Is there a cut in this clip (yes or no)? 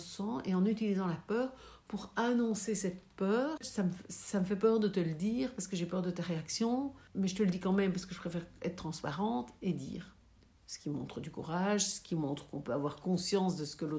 no